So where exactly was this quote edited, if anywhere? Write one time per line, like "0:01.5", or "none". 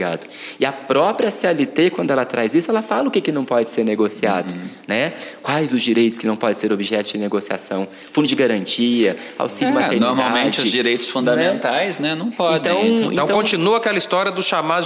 none